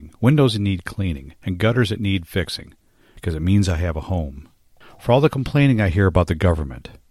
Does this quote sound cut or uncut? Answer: uncut